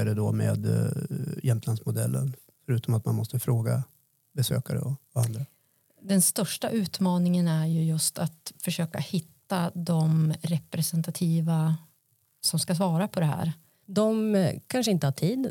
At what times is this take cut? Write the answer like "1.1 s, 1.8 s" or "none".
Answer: 13.8 s